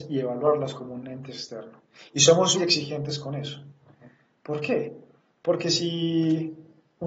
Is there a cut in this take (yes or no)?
yes